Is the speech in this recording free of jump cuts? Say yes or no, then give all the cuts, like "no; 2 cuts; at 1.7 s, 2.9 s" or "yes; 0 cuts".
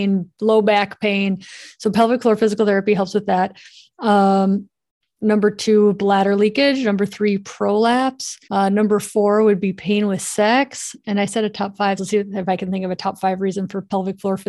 no; 2 cuts; at 8.4 s, 12.0 s